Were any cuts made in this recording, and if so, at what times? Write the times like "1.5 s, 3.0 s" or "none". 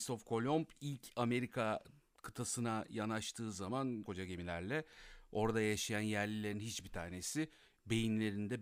4.0 s